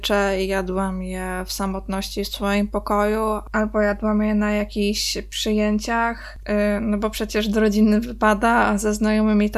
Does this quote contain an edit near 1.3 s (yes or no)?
no